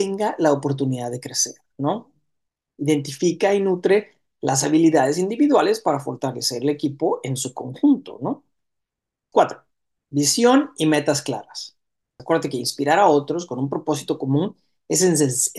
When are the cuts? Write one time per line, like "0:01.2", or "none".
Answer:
0:09.3
0:12.2